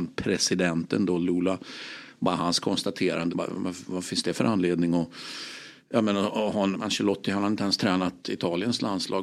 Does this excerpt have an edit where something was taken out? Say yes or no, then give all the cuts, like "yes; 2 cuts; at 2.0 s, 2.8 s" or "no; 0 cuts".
yes; 2 cuts; at 3.3 s, 6.7 s